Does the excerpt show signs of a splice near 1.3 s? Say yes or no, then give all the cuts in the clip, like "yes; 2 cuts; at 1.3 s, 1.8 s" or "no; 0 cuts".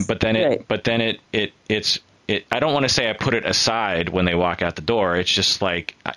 yes; 1 cut; at 1.3 s